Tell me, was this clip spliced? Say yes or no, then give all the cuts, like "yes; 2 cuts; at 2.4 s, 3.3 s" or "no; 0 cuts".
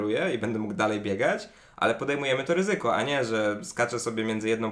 no; 0 cuts